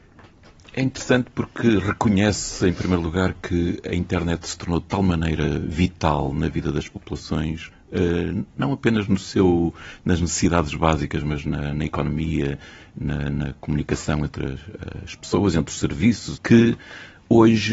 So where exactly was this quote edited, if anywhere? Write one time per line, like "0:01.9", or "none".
0:16.4